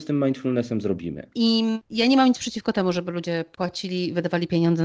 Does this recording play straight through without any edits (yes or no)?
no